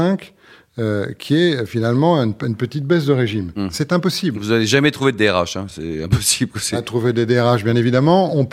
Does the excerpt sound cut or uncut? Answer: uncut